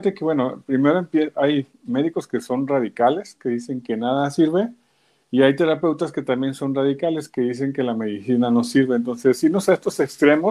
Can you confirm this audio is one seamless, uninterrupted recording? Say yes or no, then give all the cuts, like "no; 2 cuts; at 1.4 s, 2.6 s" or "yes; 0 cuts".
yes; 0 cuts